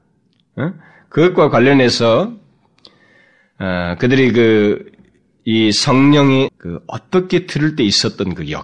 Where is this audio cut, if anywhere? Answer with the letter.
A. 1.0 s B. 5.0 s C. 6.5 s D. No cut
C